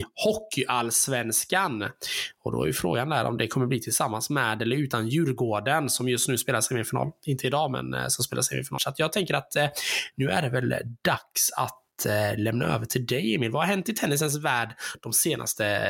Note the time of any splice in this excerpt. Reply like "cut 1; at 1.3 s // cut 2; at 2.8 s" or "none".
cut 1; at 8.8 s